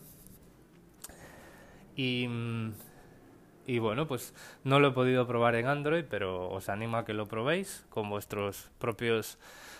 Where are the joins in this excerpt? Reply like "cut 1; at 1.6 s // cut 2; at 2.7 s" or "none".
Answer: none